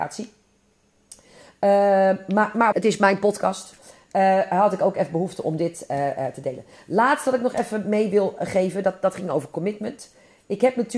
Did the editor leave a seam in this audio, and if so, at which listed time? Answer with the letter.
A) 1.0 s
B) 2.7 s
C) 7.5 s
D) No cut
B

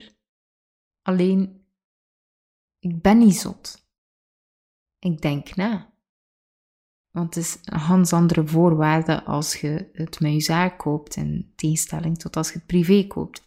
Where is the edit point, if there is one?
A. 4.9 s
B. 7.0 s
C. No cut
B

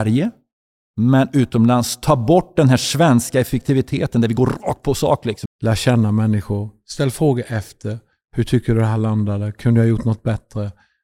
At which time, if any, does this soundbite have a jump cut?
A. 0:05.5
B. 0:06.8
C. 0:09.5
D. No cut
A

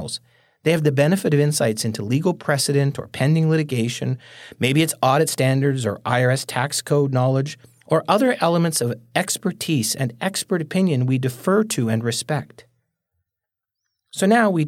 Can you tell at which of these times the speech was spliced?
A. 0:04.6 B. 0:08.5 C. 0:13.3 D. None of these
D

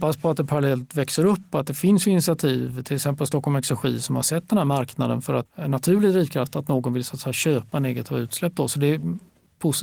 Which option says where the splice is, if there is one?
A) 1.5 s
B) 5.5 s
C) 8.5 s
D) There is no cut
B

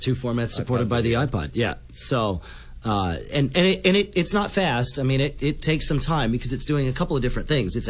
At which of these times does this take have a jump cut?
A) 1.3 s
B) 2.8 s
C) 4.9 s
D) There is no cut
D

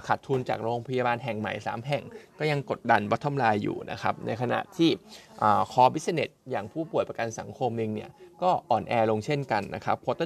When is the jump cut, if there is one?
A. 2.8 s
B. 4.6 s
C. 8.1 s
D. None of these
A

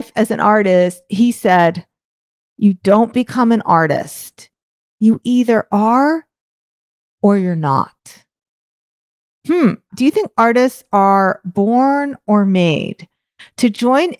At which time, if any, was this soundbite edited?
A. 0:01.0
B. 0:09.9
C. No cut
B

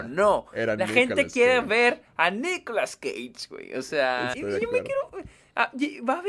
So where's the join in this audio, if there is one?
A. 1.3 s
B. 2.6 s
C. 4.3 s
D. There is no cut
C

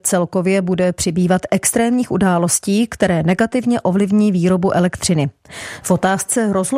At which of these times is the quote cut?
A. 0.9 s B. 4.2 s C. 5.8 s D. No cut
C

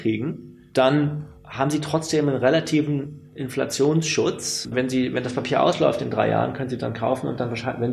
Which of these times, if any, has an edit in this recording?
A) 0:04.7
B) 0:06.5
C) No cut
A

